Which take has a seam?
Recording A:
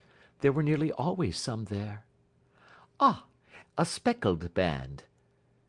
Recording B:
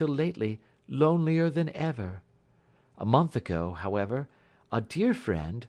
A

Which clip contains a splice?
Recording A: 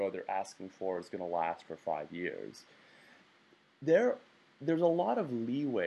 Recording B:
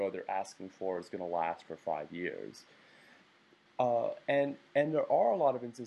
B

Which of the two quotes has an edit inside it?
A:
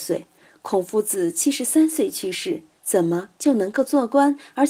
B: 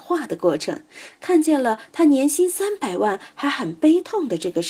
A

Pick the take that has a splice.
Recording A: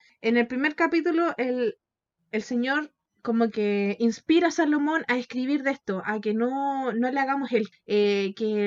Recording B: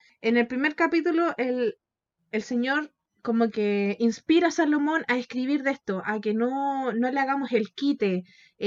A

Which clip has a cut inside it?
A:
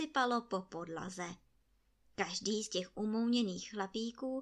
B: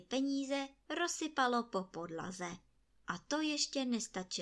B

